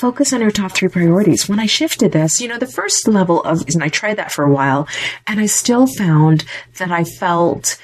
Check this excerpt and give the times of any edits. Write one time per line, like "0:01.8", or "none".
0:03.7